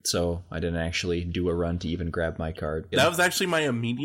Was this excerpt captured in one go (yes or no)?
no